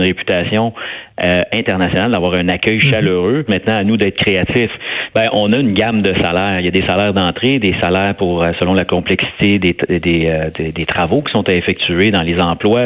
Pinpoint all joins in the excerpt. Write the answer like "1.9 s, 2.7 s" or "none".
3.5 s, 5.1 s